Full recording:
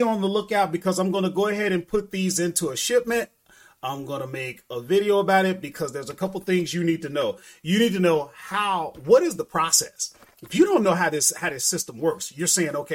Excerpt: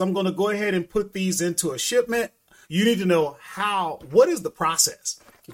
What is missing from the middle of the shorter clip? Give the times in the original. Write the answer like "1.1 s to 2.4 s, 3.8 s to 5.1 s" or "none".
3.6 s to 7.6 s

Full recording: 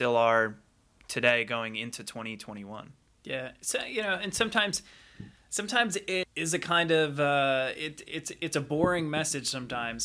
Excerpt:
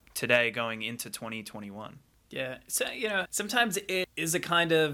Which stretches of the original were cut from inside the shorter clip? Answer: 4.2 s to 5.4 s

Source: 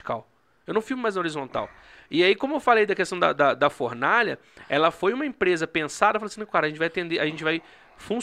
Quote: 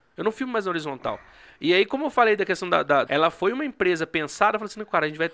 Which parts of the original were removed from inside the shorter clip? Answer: 3.6 s to 4.7 s

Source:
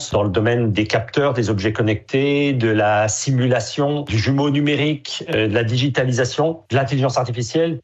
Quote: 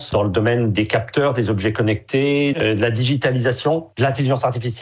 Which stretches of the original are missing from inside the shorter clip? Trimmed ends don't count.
2.5 s to 5.3 s

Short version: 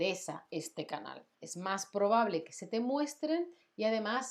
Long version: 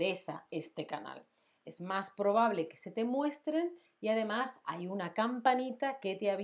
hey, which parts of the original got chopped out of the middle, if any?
1.3 s to 1.6 s

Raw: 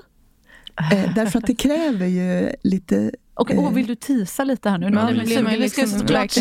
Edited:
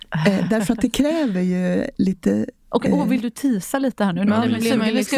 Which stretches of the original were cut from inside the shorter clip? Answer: none

